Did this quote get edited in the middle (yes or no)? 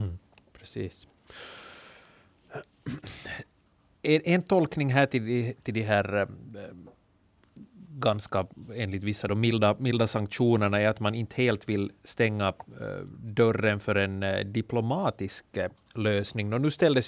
no